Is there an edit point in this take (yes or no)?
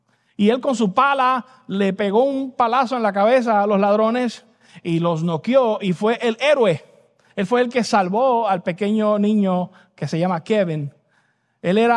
no